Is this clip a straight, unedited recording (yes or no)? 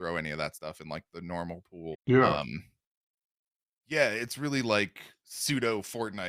no